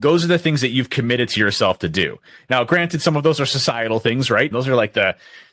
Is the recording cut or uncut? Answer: cut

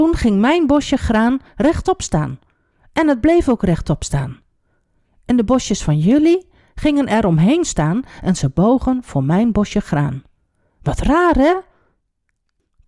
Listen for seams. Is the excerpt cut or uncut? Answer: uncut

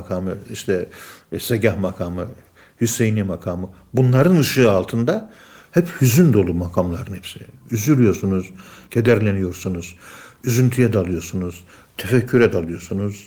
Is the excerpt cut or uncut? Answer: uncut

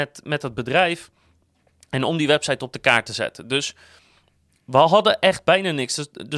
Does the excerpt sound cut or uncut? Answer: uncut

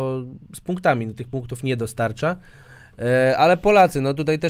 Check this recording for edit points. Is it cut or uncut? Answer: uncut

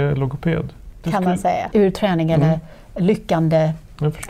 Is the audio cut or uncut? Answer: cut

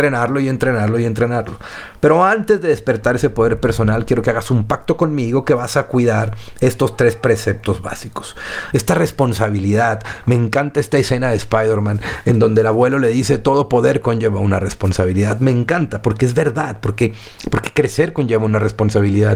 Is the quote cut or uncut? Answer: uncut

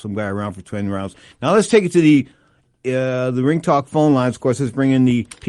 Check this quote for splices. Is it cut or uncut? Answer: cut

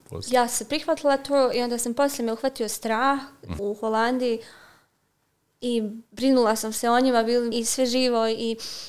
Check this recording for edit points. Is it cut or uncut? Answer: cut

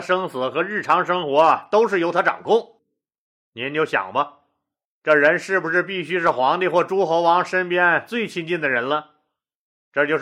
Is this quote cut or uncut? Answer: uncut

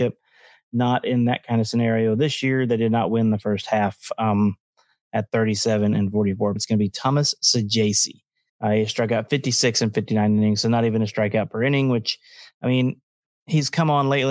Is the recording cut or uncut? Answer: cut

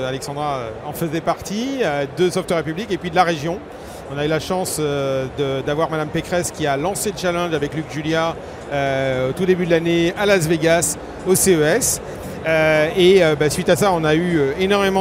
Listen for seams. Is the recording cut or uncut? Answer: cut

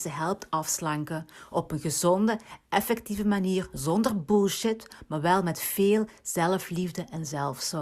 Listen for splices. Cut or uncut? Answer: uncut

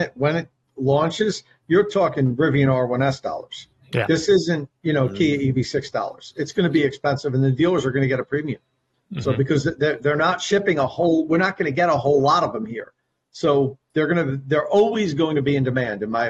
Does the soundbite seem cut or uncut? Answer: uncut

